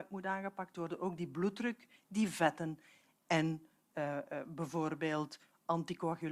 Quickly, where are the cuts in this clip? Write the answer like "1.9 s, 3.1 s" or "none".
none